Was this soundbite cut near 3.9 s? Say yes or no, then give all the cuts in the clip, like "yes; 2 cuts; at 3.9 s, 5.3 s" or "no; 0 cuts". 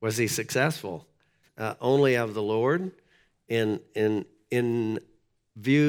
no; 1 cut; at 1.5 s